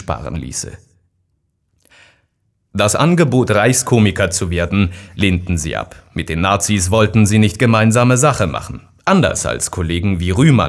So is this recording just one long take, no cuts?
yes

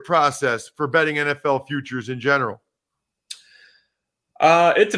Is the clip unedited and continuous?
yes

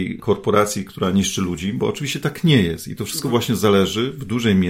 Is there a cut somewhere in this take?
no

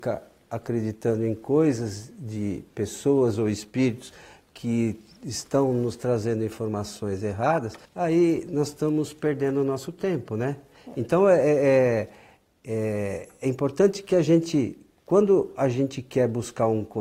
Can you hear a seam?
yes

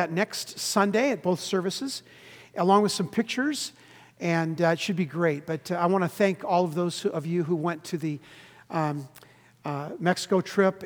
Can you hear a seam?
no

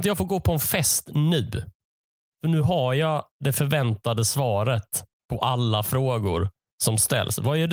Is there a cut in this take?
no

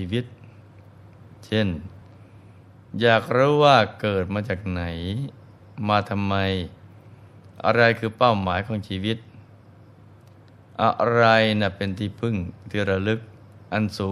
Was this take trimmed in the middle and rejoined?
no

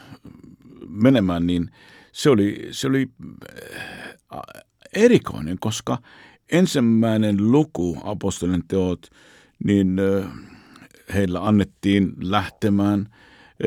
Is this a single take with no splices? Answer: yes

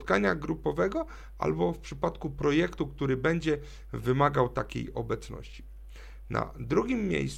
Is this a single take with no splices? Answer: yes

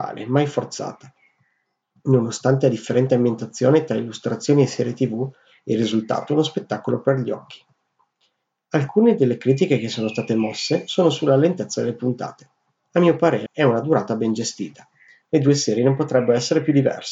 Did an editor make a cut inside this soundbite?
yes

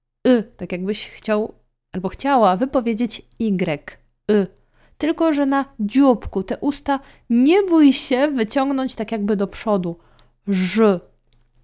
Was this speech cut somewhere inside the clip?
no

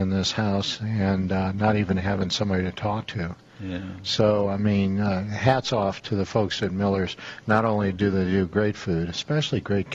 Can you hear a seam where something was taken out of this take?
no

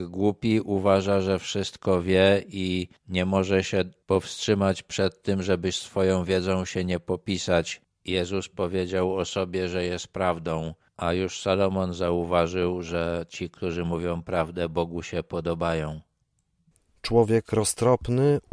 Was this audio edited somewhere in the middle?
yes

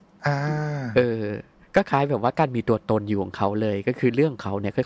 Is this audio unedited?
yes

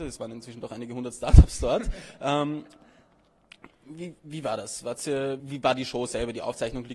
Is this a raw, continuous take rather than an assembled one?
no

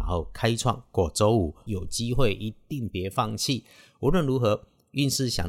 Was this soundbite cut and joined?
yes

